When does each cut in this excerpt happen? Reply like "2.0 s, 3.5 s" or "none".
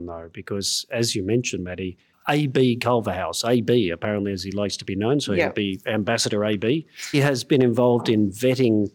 7.1 s